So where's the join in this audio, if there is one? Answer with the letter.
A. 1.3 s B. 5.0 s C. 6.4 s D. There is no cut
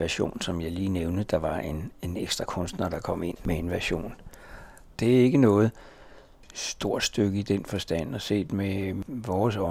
B